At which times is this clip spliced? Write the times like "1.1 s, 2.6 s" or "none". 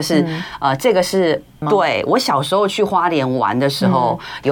1.6 s